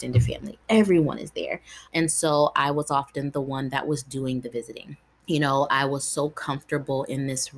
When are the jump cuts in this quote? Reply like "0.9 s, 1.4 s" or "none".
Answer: 1.9 s, 5.2 s